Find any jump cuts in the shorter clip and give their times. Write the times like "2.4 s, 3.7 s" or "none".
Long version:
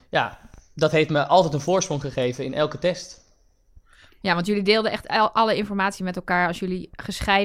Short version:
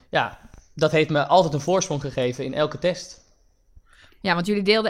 none